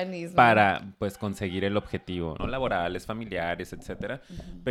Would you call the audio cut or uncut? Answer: cut